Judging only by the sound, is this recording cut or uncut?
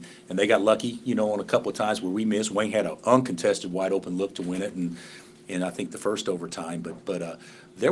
uncut